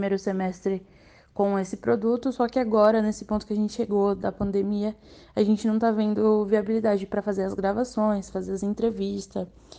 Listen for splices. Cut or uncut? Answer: uncut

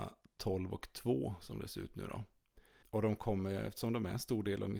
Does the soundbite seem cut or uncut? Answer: cut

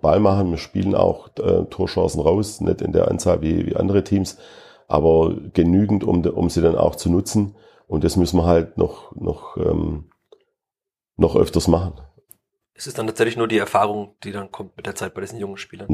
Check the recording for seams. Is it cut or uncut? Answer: uncut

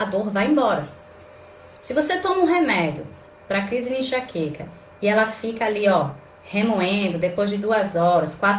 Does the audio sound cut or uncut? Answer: uncut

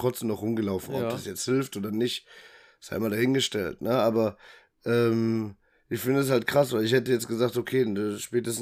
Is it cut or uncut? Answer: uncut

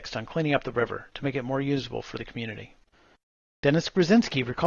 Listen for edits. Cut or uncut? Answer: uncut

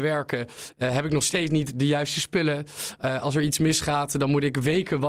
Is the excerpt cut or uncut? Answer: uncut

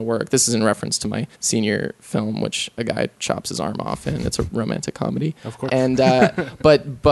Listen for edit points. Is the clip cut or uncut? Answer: cut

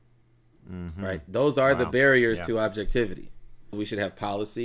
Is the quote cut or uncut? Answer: cut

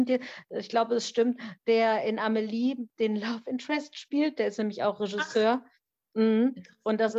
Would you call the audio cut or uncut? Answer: uncut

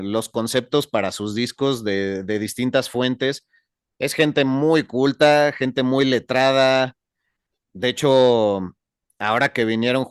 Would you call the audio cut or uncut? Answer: uncut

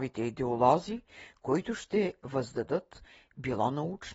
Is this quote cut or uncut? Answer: uncut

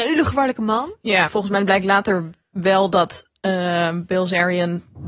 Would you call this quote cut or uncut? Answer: cut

